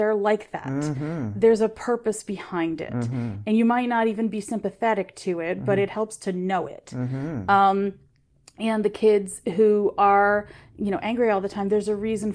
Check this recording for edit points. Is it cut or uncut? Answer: uncut